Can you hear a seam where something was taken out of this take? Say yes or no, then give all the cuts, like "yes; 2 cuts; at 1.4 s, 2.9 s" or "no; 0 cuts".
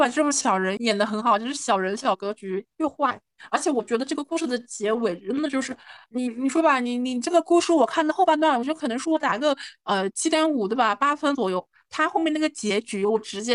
no; 0 cuts